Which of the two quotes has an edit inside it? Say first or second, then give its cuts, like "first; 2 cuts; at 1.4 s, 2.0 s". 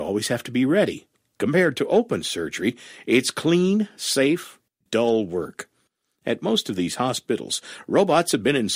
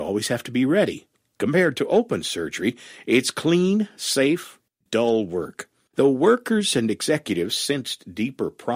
second; 1 cut; at 5.9 s